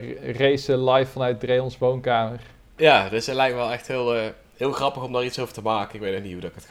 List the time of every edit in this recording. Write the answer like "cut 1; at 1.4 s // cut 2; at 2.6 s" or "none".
none